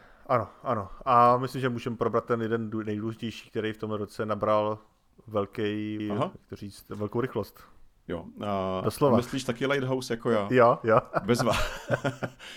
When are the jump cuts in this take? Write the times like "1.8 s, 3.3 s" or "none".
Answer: 6.0 s